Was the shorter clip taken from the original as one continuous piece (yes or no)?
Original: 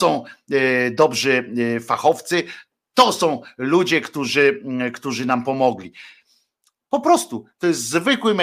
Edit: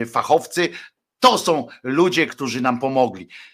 no